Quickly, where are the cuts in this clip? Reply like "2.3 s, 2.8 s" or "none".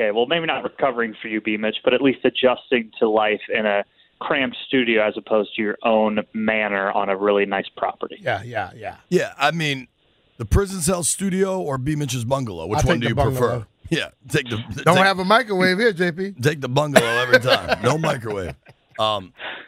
none